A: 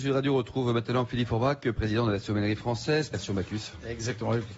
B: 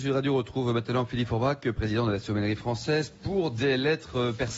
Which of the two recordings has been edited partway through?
A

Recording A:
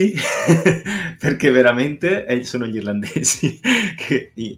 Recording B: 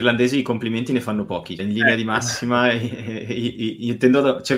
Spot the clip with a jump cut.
B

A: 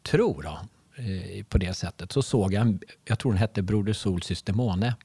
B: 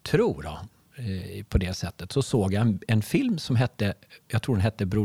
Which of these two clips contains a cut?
A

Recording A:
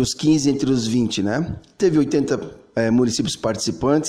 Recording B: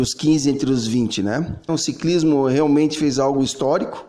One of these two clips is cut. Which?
B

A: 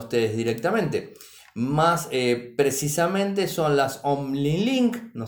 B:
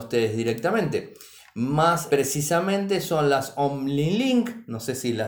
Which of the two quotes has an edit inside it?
B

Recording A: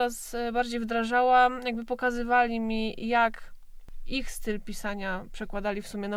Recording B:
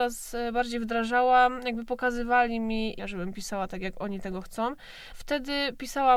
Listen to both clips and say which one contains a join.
B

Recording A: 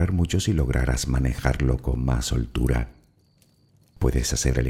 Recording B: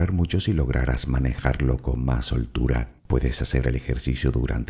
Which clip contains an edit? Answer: B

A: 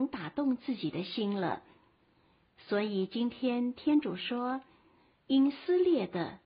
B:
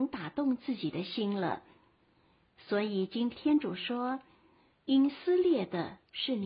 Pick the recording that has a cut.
B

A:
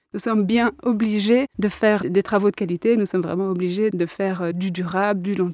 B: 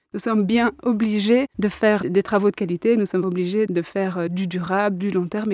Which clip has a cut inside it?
B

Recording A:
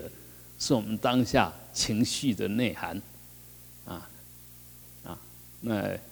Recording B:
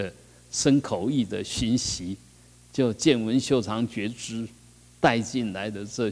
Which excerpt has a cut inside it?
A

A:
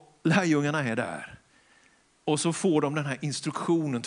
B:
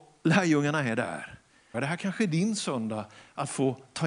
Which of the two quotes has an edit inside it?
B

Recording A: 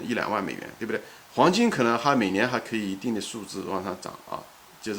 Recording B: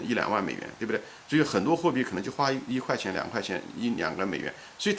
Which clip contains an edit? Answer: A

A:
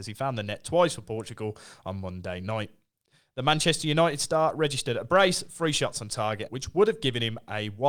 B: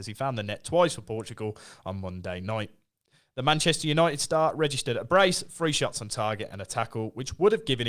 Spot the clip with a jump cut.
A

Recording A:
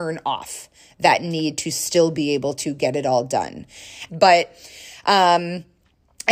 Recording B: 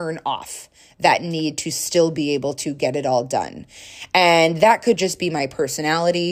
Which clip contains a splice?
A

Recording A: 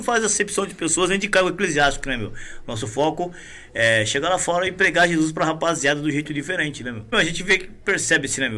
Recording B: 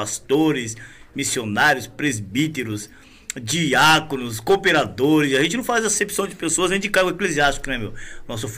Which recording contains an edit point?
A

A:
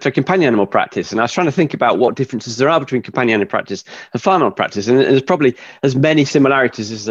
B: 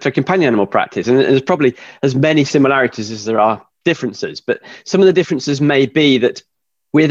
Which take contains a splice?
B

